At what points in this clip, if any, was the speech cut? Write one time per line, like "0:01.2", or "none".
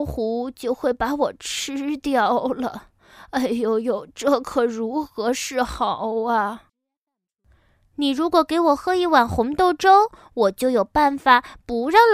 none